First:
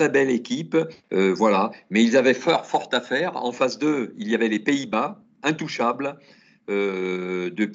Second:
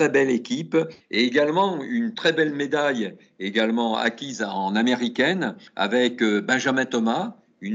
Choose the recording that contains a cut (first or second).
second